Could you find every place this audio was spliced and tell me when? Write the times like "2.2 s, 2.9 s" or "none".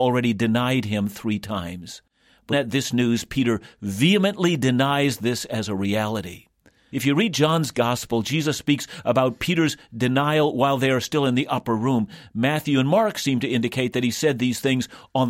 2.5 s, 6.9 s